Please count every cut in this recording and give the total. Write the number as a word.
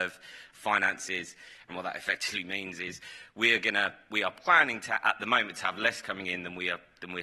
one